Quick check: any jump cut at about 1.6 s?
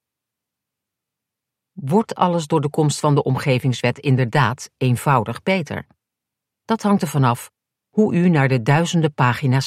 no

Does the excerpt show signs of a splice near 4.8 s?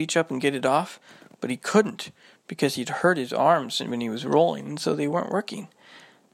no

